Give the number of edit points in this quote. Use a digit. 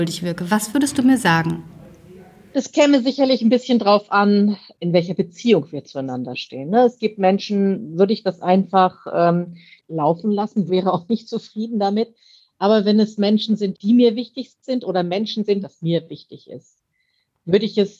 2